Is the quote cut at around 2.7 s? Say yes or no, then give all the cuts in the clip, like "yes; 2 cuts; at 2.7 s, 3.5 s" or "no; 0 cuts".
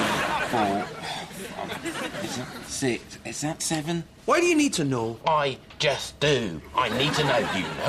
yes; 1 cut; at 2.7 s